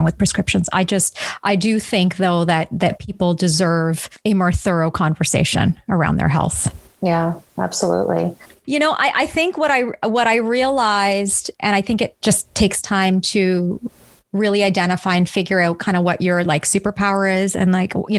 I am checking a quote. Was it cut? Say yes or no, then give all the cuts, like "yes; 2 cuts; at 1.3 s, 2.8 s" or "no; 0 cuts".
yes; 2 cuts; at 8.6 s, 11.5 s